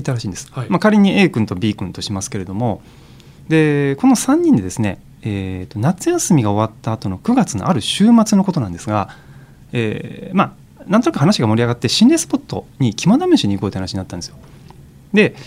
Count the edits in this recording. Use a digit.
0